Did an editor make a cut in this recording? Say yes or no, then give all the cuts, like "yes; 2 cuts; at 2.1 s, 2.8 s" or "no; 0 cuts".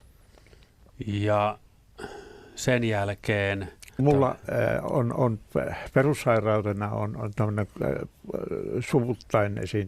yes; 1 cut; at 4.0 s